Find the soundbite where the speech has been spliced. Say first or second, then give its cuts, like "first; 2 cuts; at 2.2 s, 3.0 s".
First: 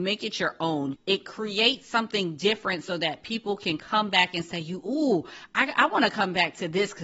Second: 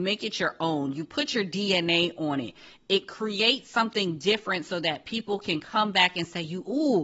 first; 1 cut; at 0.9 s